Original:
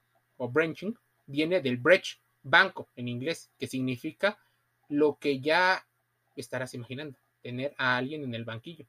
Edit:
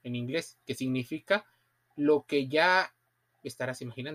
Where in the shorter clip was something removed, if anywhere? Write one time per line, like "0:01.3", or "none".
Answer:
none